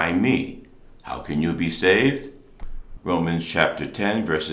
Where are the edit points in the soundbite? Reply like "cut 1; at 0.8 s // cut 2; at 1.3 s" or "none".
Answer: cut 1; at 3.0 s